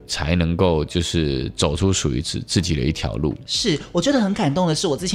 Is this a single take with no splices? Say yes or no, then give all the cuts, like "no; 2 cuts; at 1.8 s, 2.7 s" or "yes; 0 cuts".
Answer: yes; 0 cuts